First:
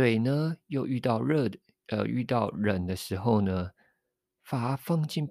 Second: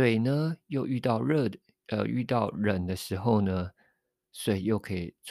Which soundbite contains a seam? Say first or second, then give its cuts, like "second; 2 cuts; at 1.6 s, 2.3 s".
second; 1 cut; at 4.2 s